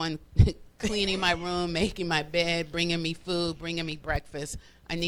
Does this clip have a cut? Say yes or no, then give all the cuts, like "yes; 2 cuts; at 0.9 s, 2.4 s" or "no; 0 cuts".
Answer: no; 0 cuts